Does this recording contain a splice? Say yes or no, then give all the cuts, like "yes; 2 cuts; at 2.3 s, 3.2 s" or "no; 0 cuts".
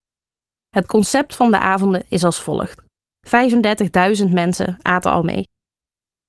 yes; 1 cut; at 3.1 s